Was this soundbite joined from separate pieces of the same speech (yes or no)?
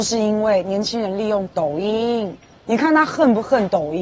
yes